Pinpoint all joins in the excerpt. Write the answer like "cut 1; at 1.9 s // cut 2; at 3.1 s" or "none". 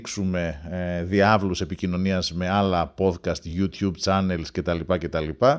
none